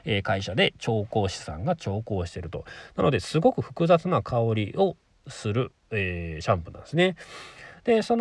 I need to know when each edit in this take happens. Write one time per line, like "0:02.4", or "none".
none